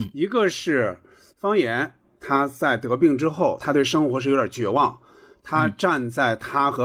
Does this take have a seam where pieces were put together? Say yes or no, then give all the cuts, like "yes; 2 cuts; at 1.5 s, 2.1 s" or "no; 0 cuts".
no; 0 cuts